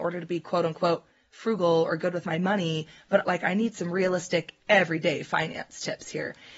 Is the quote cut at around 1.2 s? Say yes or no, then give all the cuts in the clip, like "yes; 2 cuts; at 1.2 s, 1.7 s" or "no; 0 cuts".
no; 1 cut; at 3.2 s